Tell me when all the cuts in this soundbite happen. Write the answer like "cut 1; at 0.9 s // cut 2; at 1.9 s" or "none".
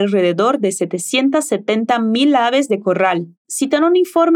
cut 1; at 3.4 s